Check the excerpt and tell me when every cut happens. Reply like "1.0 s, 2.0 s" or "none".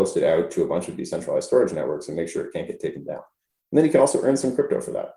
none